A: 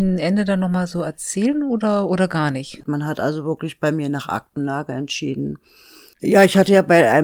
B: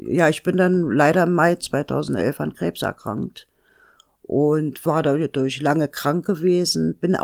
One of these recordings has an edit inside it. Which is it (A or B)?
A